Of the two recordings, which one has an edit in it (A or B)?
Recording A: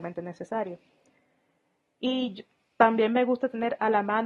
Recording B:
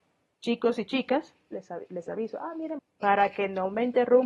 B